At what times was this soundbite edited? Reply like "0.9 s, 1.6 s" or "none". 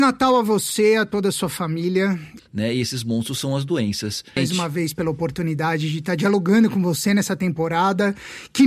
2.4 s, 4.4 s